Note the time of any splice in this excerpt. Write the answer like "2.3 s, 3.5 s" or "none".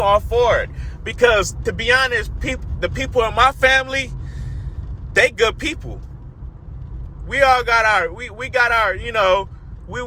none